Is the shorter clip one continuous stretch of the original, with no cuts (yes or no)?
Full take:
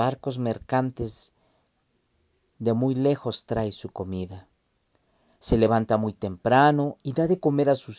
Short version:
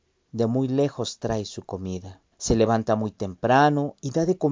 no